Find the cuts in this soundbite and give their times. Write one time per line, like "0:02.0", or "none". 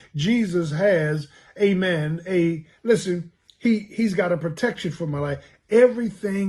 none